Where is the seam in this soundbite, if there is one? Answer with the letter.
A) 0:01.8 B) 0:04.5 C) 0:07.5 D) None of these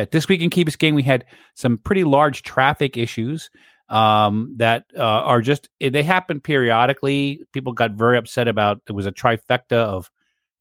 D